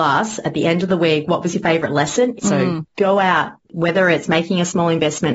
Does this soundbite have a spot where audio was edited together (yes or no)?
yes